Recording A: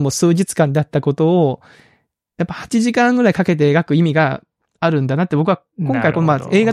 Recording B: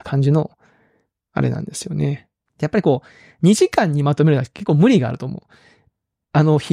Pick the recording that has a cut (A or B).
B